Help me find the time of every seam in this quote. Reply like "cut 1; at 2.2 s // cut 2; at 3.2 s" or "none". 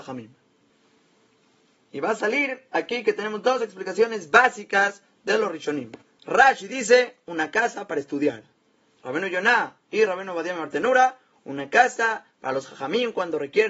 none